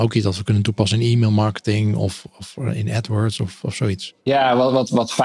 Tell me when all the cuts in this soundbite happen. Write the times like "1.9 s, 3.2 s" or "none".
none